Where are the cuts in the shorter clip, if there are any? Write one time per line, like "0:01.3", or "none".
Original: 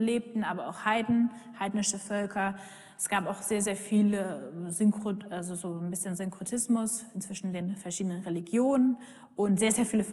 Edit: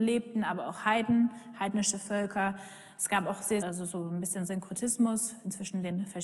0:03.6

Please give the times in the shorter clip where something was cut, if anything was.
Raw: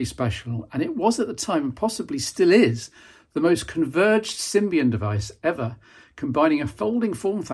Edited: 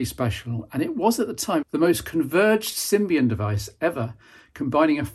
0:01.6

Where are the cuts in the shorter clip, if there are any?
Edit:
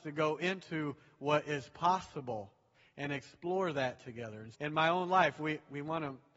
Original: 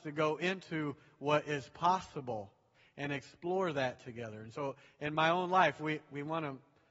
0:04.5

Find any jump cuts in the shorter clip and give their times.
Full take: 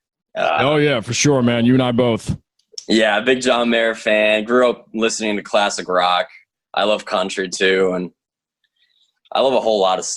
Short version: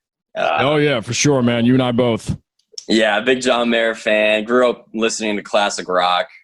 none

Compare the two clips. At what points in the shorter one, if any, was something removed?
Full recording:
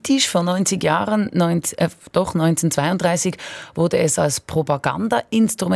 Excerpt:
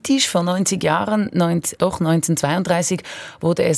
0:01.8

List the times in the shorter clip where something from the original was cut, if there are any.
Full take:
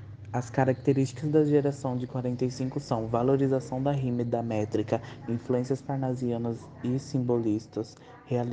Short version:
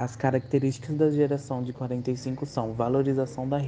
none

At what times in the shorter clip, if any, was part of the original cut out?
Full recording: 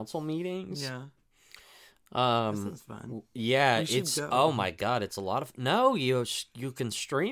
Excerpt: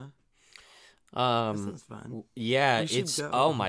none

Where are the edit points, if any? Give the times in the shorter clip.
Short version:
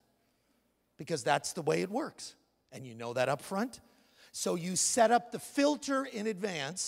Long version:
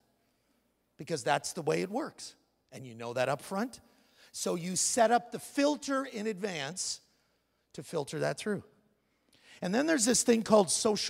none

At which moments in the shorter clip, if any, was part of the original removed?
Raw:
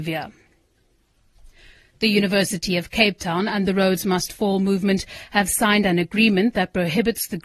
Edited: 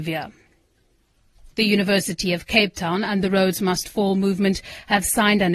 0:01.5

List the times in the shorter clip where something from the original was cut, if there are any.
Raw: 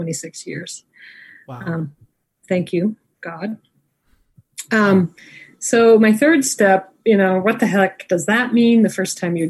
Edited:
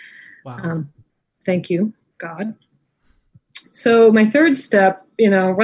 0:03.6

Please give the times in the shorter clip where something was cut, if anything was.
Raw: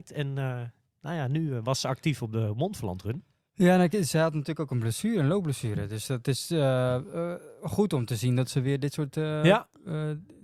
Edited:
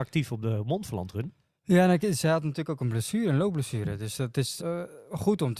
0:04.6

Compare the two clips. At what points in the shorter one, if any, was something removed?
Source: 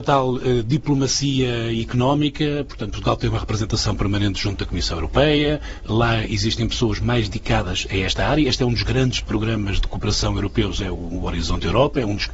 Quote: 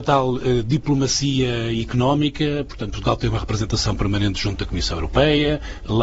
none

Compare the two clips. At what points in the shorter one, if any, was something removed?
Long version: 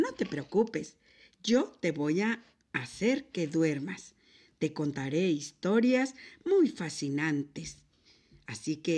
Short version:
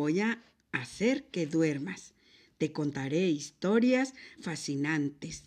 0:04.4

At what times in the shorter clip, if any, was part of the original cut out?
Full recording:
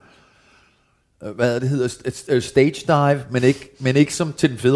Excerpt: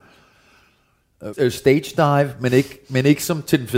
0:01.3

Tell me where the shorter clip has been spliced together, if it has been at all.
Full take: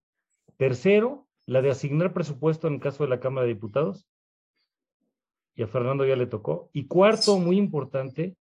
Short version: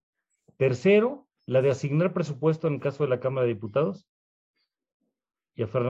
none

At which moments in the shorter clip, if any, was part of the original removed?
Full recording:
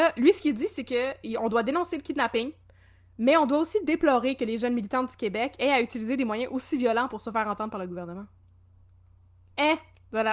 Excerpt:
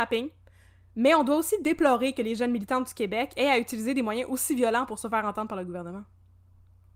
none

